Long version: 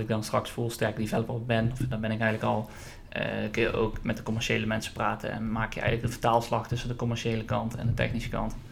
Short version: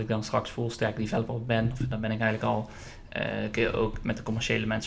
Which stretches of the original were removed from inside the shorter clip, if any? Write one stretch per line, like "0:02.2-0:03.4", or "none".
none